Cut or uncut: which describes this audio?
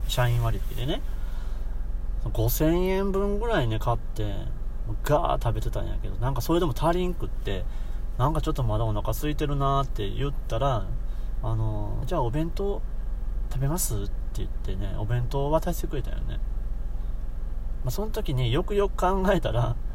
cut